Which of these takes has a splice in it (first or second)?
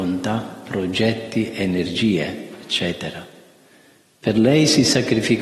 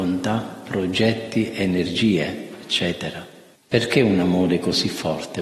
second